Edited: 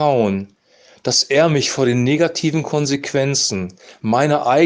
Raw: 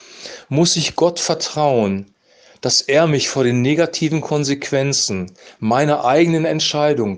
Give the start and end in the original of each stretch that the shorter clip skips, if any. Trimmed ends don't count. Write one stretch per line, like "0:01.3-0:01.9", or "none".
none